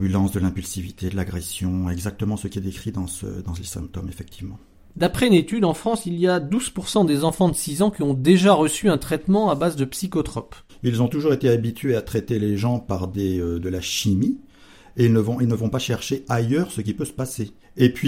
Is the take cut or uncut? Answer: cut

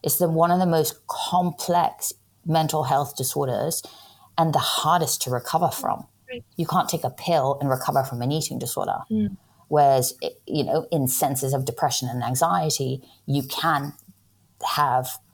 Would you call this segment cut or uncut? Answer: uncut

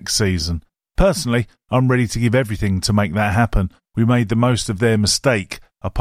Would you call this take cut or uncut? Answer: cut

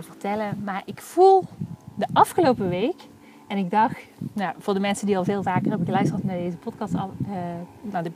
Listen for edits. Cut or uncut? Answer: uncut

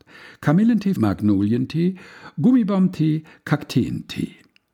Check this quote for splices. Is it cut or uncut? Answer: cut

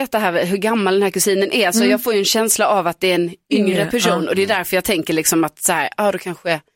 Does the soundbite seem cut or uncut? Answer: uncut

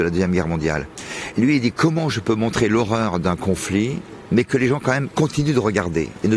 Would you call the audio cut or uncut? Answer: cut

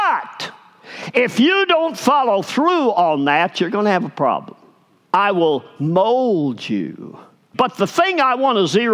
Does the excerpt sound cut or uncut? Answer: cut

